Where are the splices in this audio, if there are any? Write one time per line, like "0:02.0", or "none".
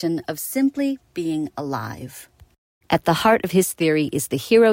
0:02.8